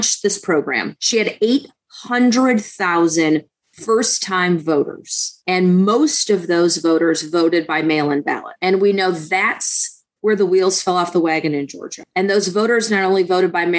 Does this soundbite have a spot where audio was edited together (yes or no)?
yes